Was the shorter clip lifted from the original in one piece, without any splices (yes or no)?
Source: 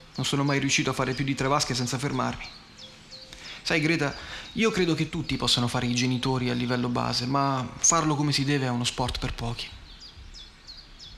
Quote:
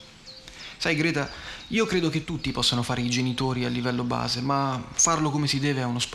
yes